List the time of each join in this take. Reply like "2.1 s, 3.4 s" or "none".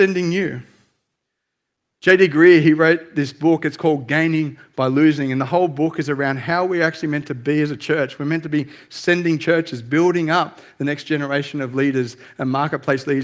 none